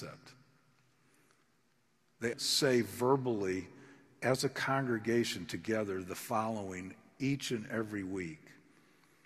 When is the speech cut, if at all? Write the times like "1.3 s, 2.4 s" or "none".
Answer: 2.3 s